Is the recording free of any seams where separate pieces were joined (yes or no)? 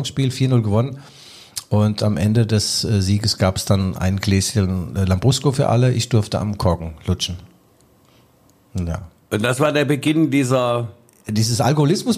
yes